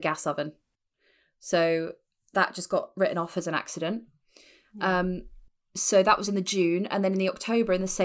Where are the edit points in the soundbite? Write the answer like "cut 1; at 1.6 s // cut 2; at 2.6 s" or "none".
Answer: none